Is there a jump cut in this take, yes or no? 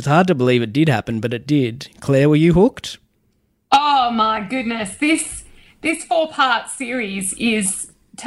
no